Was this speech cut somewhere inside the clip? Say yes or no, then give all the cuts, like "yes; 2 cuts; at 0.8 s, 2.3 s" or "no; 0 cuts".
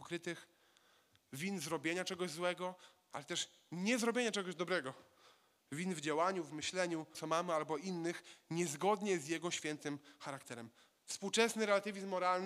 yes; 2 cuts; at 7.1 s, 10.9 s